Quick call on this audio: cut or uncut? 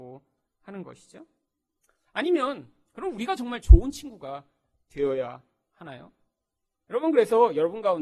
uncut